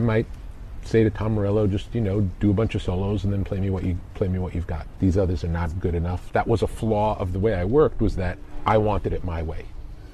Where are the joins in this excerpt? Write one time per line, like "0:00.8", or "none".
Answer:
0:05.0
0:06.3

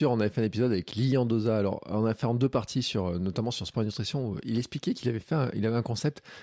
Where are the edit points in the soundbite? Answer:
none

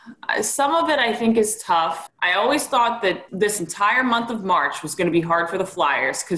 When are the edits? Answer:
0:02.1
0:03.3

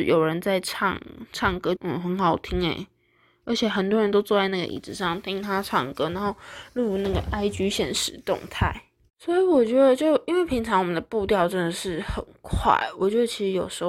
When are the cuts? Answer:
0:01.8

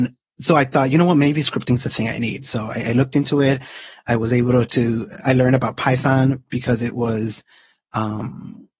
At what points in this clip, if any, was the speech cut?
none

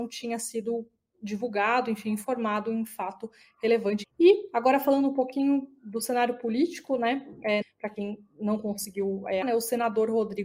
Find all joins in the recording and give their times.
0:04.0
0:07.6
0:09.4

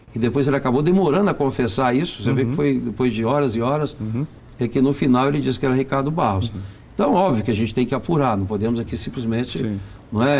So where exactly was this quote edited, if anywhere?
none

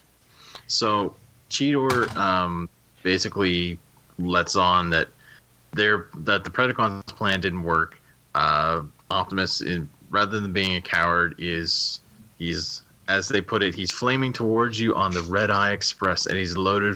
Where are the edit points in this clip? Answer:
none

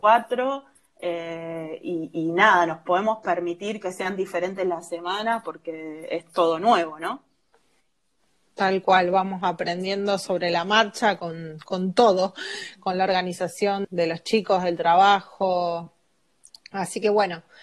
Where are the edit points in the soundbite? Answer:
0:13.8

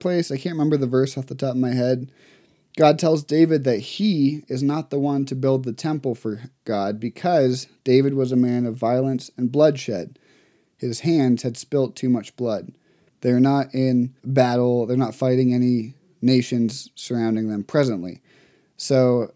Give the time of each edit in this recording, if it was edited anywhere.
0:13.1
0:14.2

